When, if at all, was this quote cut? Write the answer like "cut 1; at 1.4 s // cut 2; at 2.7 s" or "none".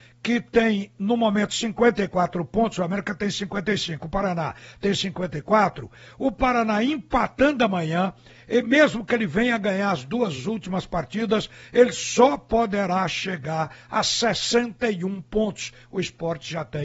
none